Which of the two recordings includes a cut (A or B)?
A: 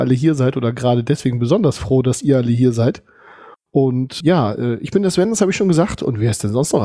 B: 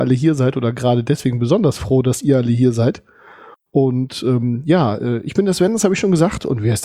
A